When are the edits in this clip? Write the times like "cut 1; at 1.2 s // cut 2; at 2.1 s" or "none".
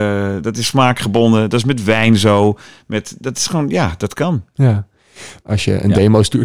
cut 1; at 5.4 s